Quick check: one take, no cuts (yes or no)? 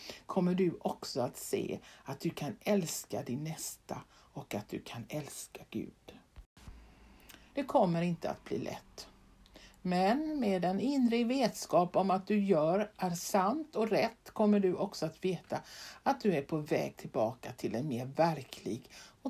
no